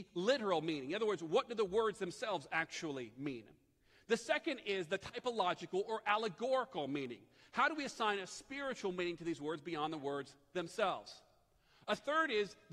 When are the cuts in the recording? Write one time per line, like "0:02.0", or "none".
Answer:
none